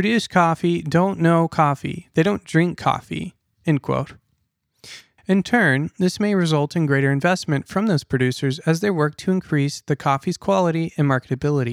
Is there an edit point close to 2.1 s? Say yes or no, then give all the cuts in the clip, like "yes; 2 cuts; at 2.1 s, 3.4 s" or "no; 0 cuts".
no; 2 cuts; at 3.5 s, 5.2 s